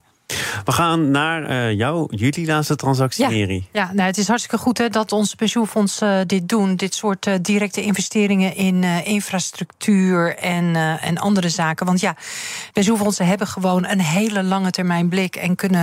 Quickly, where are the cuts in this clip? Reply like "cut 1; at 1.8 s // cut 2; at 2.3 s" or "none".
cut 1; at 12.7 s